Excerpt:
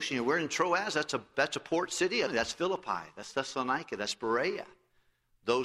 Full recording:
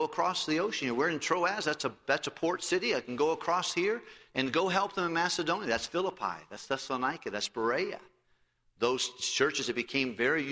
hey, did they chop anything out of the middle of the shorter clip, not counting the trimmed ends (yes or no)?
yes